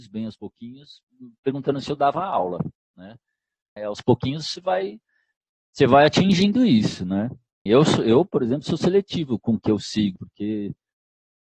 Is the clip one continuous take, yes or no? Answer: no